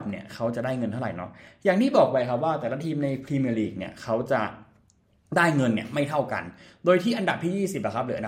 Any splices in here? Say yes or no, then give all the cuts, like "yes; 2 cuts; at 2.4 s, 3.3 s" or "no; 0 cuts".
no; 0 cuts